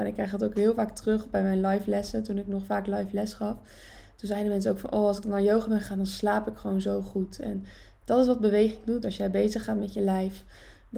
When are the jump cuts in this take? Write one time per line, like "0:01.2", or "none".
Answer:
none